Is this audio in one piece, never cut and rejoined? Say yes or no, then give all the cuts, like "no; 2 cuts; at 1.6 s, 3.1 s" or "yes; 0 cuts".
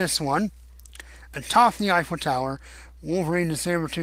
no; 1 cut; at 1.3 s